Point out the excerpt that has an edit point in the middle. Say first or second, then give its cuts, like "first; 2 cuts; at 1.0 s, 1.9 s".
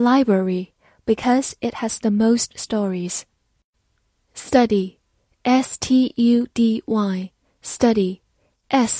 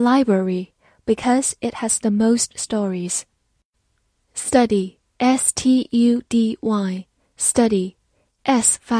second; 1 cut; at 5.1 s